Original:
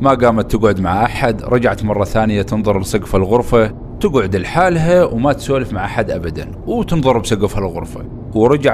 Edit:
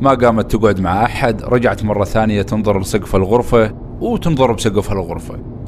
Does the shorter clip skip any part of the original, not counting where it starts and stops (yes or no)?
yes